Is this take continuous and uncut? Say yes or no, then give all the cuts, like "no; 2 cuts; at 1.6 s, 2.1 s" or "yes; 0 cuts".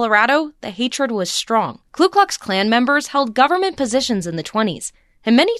no; 1 cut; at 1.9 s